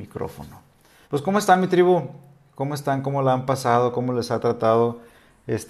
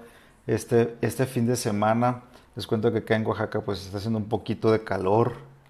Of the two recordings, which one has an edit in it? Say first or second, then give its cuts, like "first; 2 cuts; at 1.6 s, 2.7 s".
first; 1 cut; at 1.0 s